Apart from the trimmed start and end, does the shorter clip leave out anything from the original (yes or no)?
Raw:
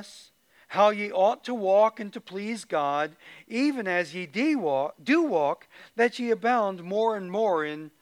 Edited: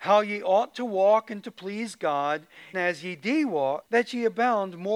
yes